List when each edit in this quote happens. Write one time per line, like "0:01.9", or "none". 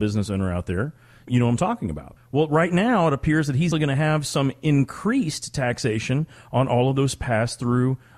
0:02.2
0:03.7